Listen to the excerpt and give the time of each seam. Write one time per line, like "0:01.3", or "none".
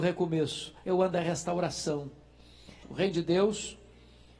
0:02.8